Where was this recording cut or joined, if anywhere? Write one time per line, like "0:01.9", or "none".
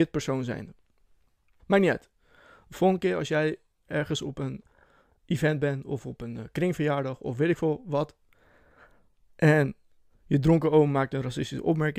0:01.6